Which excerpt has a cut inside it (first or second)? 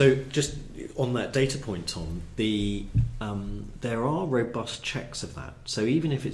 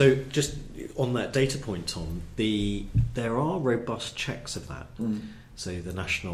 second